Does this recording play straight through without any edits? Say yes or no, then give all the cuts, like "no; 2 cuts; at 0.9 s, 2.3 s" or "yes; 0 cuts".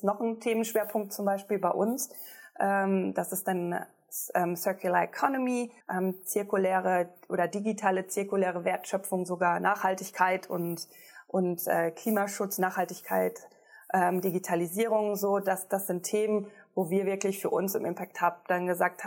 no; 1 cut; at 5.8 s